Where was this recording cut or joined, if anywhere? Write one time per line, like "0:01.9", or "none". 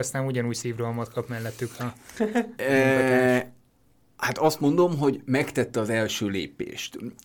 none